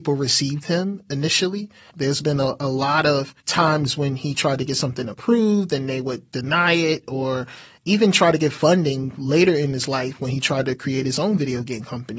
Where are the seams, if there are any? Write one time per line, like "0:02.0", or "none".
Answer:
0:01.9
0:03.4